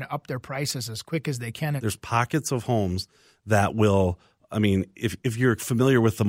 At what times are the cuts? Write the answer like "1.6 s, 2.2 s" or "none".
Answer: 1.8 s